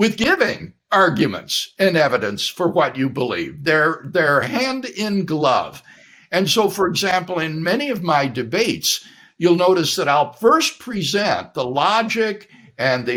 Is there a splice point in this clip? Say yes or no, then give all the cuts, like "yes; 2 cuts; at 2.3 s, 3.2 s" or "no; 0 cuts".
no; 0 cuts